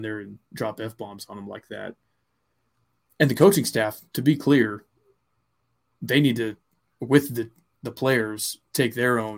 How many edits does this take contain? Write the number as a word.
zero